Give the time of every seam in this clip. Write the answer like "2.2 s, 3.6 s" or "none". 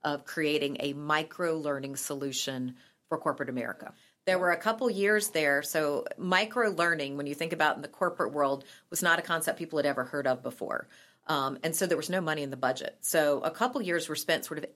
none